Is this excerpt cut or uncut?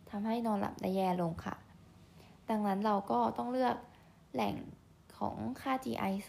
uncut